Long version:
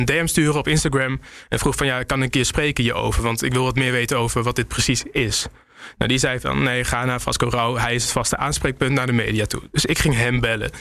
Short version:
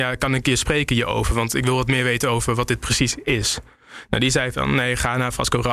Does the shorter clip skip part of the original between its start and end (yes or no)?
no